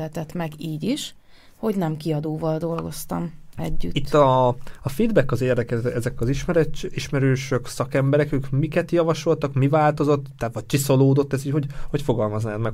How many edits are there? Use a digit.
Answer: 0